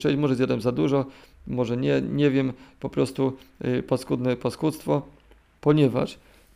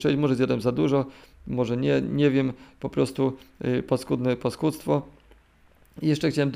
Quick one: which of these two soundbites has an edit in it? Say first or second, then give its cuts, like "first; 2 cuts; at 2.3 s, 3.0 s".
first; 1 cut; at 5.6 s